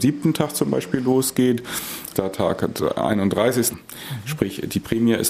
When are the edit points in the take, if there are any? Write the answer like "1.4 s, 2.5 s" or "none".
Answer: 2.1 s, 3.7 s